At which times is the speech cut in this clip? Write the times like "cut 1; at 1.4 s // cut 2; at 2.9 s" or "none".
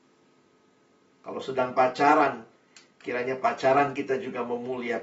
cut 1; at 1.1 s